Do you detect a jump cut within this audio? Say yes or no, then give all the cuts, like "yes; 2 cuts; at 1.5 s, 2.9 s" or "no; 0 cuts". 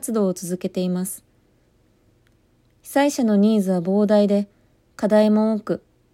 no; 0 cuts